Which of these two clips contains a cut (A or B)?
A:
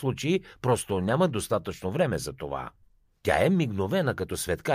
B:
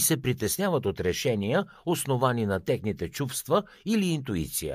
A